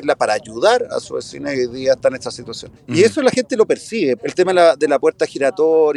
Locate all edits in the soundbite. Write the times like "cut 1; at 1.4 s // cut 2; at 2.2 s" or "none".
cut 1; at 2.8 s // cut 2; at 4.2 s